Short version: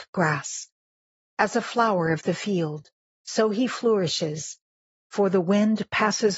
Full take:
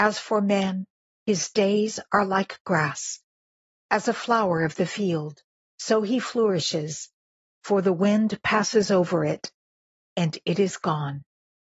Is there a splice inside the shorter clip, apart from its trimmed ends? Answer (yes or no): no